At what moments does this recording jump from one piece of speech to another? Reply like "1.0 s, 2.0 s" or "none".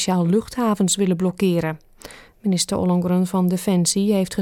2.3 s